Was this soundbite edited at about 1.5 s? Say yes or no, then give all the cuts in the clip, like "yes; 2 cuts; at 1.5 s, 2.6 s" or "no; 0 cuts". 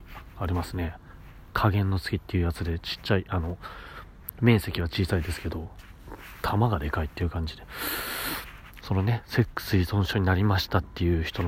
no; 1 cut; at 8.8 s